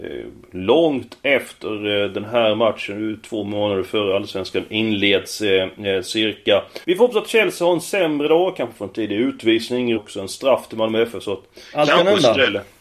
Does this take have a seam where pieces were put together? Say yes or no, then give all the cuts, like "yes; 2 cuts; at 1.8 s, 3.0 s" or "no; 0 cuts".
yes; 2 cuts; at 6.8 s, 10.0 s